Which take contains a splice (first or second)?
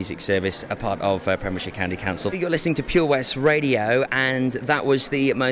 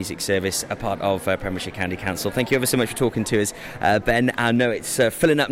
first